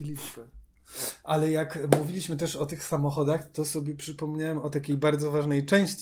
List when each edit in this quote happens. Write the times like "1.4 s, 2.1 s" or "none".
none